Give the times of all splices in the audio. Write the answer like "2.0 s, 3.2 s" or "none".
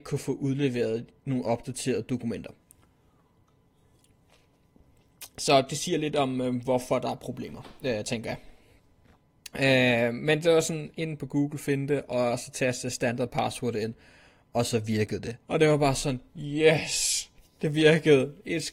15.4 s